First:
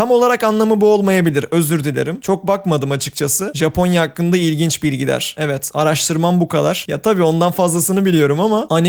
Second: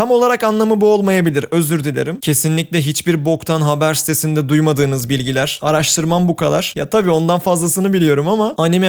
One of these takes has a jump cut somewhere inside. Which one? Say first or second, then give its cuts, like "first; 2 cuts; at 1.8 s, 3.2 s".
second; 2 cuts; at 2.2 s, 5.6 s